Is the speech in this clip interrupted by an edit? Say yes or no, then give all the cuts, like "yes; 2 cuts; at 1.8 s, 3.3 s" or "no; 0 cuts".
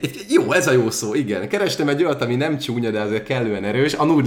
no; 0 cuts